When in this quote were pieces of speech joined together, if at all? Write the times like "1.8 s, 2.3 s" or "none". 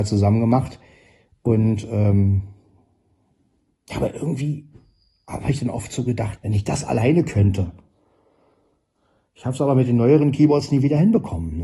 6.4 s